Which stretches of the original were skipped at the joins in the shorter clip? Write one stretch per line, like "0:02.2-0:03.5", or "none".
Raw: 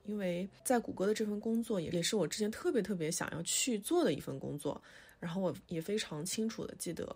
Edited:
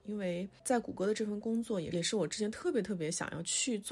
none